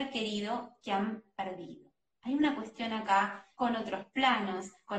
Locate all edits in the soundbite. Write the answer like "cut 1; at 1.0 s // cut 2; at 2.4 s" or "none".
cut 1; at 3.6 s